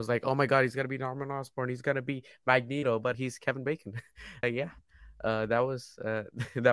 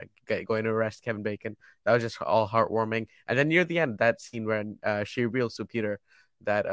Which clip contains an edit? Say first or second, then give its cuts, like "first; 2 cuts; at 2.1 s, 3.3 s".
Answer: first; 2 cuts; at 3.1 s, 4.4 s